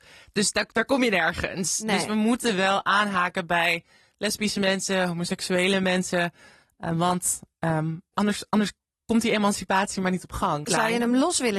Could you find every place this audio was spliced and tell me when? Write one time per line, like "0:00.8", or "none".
0:08.1
0:10.6